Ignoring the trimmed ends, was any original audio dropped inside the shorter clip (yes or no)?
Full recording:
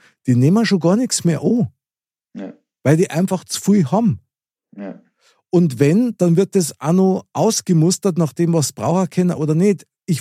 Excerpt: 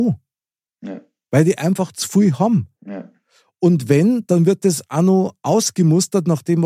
yes